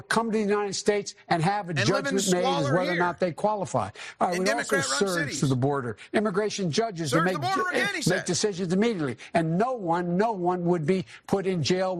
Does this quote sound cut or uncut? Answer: uncut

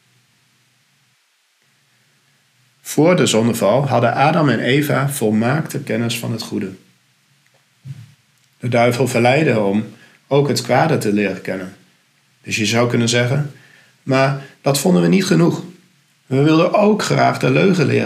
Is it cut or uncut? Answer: cut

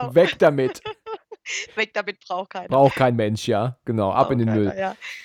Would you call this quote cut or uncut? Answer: uncut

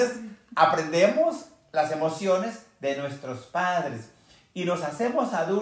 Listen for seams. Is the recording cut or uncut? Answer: uncut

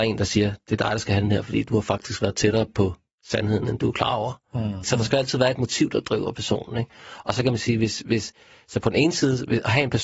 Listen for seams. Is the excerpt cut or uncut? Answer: cut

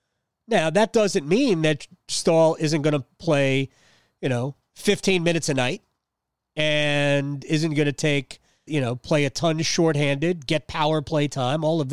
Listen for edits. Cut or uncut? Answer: cut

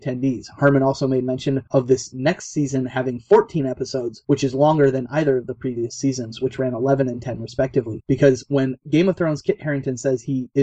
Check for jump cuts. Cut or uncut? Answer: cut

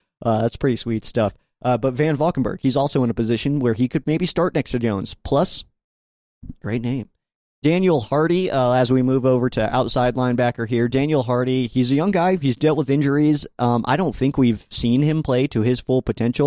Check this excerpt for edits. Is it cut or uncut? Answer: uncut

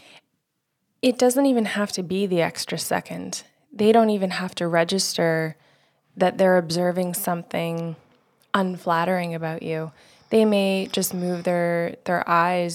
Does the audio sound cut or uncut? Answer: uncut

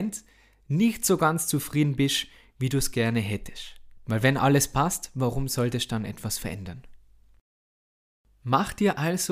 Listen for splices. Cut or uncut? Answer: uncut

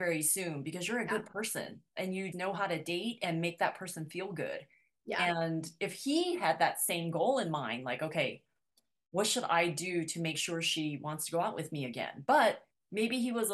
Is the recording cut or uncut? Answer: cut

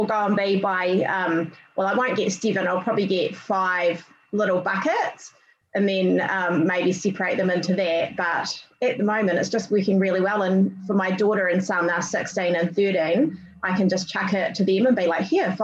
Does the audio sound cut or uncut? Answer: uncut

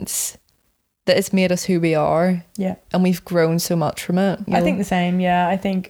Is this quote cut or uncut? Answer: cut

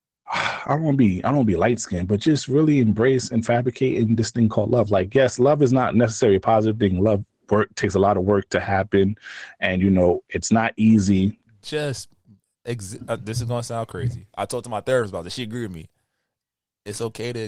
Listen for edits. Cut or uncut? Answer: cut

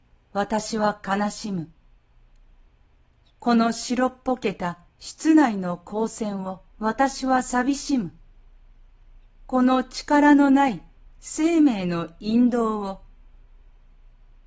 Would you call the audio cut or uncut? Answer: cut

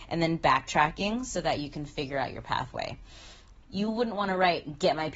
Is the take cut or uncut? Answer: cut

